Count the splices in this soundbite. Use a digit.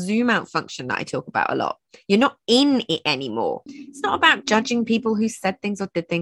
1